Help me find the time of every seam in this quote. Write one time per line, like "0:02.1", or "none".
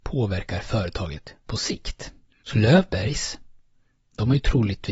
0:02.3